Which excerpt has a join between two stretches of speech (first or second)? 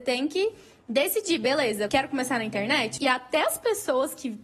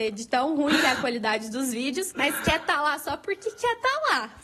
first